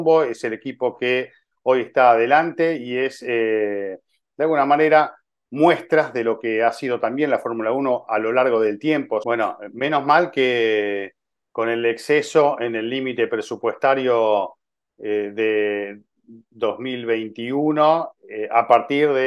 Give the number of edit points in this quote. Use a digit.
1